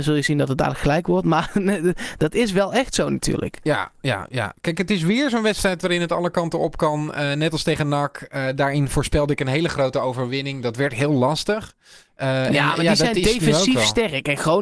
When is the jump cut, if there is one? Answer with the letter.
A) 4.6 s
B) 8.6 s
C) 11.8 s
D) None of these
D